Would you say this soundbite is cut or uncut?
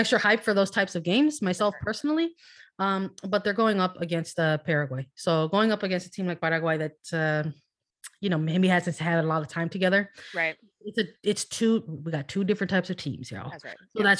uncut